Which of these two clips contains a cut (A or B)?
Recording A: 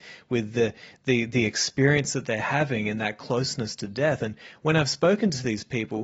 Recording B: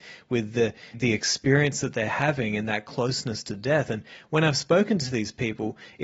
B